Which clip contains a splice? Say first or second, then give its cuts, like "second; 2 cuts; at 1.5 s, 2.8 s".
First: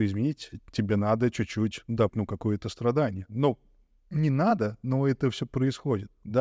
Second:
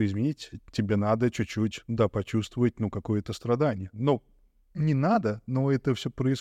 first; 1 cut; at 2.1 s